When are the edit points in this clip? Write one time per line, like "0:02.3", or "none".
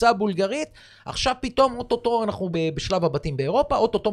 0:02.5